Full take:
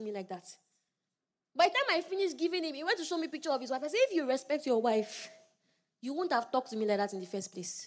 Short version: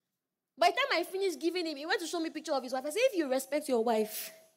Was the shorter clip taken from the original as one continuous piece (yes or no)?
yes